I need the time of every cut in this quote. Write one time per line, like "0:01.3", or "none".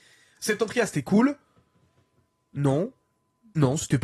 none